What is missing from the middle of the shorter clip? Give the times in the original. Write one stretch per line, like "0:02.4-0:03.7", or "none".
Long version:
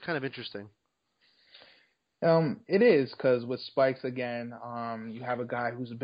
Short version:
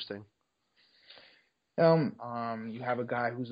0:02.6-0:04.6